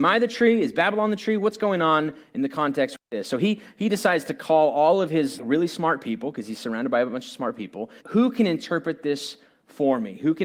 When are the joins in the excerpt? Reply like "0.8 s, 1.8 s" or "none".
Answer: 5.4 s, 8.0 s